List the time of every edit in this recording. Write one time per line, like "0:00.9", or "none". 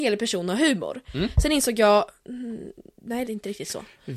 0:03.2